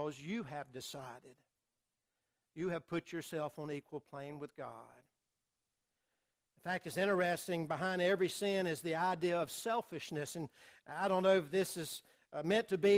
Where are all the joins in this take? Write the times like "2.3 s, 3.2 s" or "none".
none

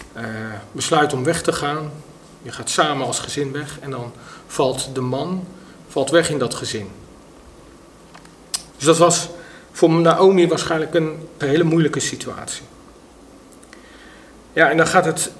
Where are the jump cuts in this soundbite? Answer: 8.7 s, 11.4 s

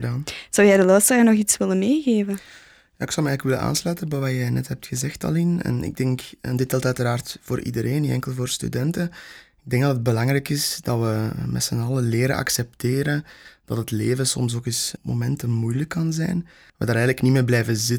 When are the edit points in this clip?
15.0 s, 16.7 s

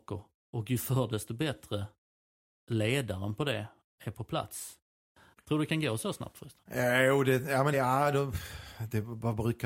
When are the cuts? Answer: 5.4 s, 7.7 s

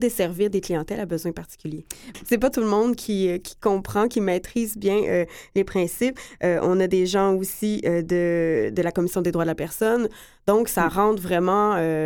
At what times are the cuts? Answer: 2.1 s

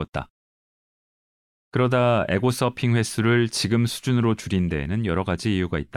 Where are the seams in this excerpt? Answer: 1.6 s

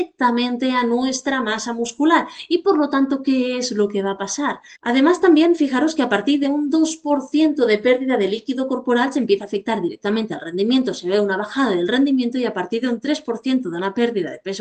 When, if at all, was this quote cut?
4.8 s

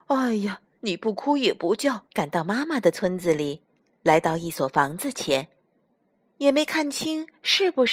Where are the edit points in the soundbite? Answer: 2.0 s

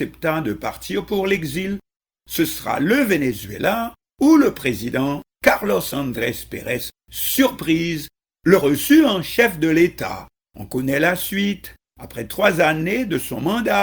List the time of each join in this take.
10.5 s

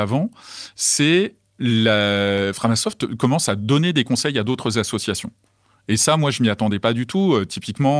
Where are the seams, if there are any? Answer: none

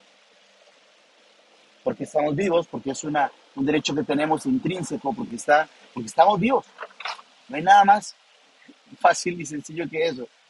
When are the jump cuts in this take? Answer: none

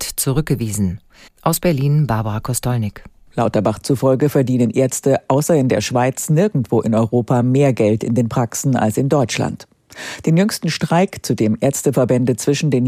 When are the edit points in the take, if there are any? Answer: 1.3 s

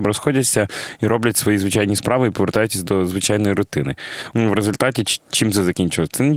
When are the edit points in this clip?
4.3 s

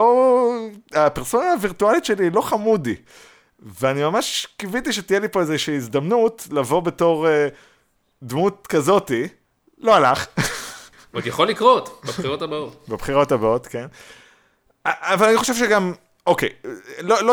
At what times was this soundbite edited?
none

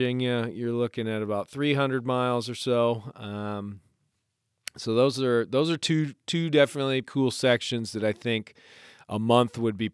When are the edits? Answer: 7.0 s

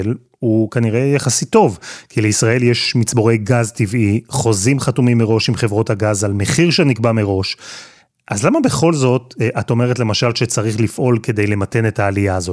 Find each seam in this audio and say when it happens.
none

